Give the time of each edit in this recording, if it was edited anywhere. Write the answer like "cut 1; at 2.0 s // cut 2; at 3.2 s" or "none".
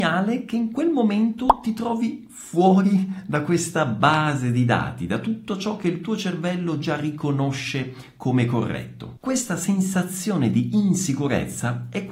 none